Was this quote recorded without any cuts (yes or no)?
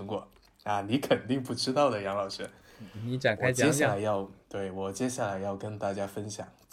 no